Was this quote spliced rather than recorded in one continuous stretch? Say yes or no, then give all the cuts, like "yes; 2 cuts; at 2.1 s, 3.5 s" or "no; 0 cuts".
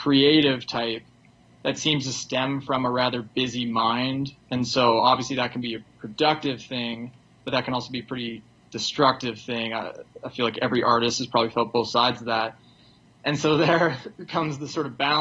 no; 0 cuts